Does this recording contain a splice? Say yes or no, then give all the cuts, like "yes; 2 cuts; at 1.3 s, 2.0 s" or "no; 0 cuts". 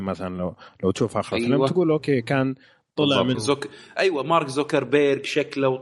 yes; 1 cut; at 3.3 s